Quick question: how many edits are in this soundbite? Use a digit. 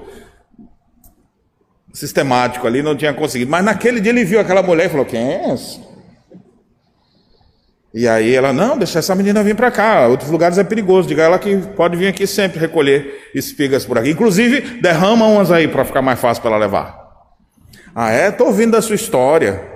0